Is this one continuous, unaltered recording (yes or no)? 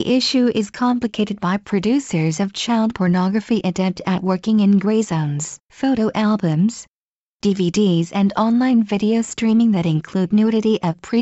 no